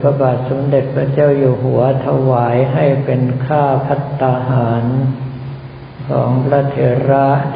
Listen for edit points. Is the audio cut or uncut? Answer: uncut